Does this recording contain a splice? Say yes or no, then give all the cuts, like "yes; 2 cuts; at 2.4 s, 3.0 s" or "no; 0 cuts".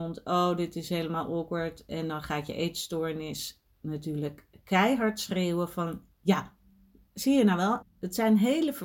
yes; 1 cut; at 7.8 s